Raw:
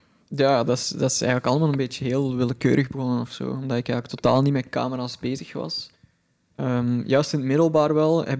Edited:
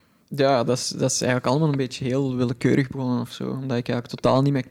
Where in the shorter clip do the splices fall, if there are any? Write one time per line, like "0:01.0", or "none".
none

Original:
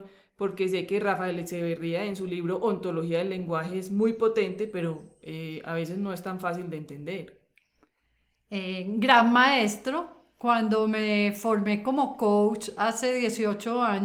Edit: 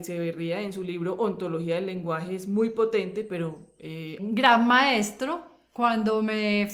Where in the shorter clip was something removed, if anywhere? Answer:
0:04.2

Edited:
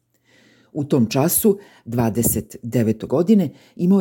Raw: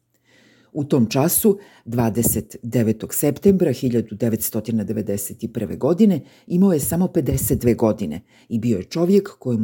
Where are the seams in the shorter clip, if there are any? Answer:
0:03.1

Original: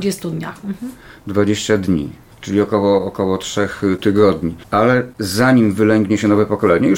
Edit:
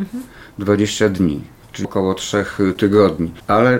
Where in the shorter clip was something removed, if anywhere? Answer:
0:01.8

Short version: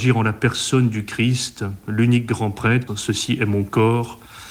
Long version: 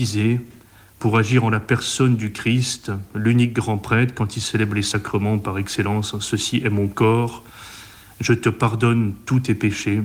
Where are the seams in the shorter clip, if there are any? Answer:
0:02.9

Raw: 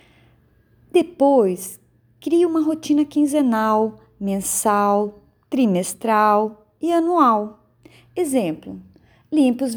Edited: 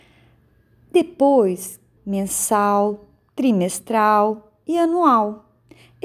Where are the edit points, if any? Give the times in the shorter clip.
0:02.0

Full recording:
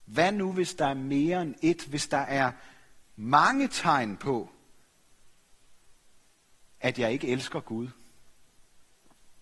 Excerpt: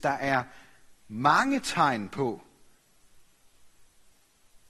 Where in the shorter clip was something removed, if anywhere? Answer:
none

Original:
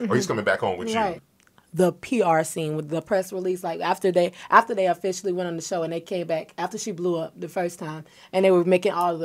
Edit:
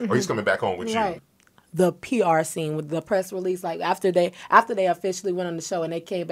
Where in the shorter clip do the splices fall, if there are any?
none

